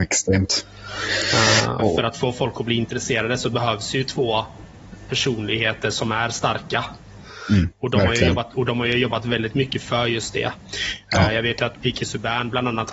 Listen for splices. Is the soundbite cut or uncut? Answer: cut